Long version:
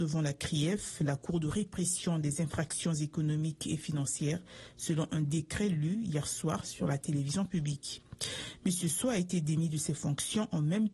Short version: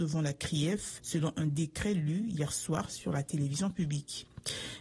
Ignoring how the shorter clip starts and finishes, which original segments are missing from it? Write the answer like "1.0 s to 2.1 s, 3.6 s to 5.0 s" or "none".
1.0 s to 4.7 s